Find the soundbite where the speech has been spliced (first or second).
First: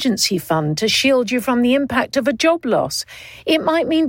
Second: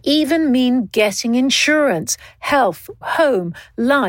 second